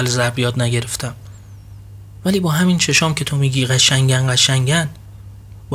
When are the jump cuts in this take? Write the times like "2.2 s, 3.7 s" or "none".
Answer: none